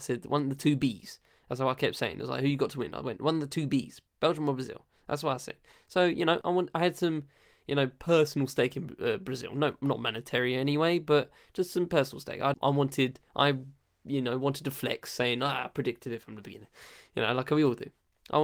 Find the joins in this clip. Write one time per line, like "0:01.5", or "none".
0:06.4
0:12.5